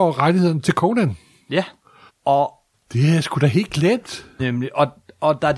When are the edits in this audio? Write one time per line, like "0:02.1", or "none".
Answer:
0:02.1
0:04.4